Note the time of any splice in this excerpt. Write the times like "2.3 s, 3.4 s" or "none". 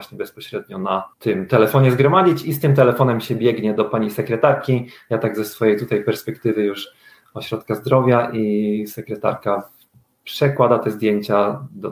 1.1 s

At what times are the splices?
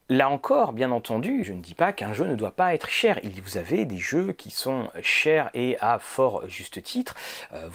1.4 s

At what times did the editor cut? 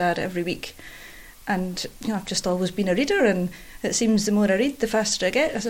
none

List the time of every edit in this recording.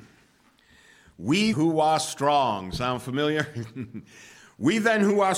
1.5 s

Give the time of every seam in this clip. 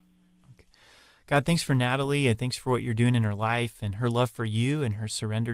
none

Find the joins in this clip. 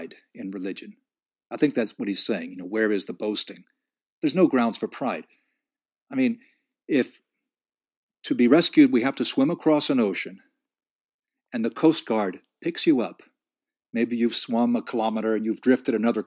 none

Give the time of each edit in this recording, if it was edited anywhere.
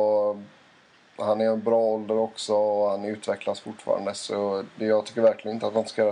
4.7 s

